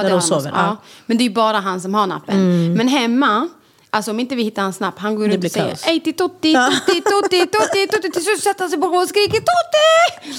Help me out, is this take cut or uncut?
uncut